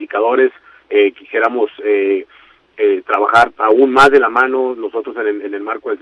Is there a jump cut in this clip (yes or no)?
no